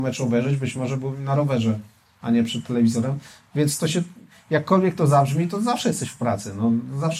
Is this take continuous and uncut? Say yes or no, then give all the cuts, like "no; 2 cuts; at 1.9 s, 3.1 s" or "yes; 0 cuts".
yes; 0 cuts